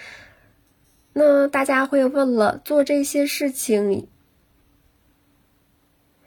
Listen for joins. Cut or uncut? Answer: uncut